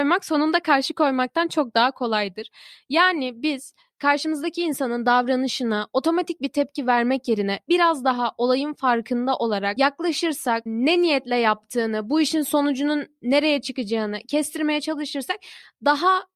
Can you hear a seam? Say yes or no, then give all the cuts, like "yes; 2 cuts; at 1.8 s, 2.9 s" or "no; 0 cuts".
yes; 1 cut; at 10.7 s